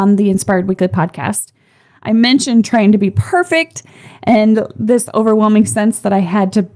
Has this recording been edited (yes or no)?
no